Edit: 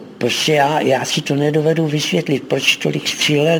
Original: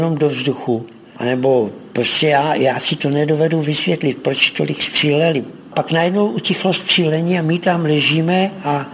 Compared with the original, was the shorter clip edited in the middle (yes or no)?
no